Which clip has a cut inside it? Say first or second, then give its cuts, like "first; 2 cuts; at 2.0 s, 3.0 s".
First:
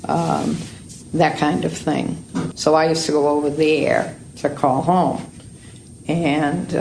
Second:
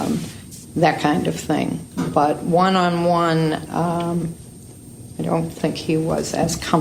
first; 1 cut; at 2.5 s